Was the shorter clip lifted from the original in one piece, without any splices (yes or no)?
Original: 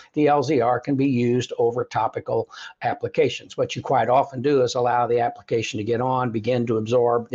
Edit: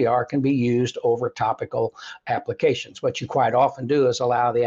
yes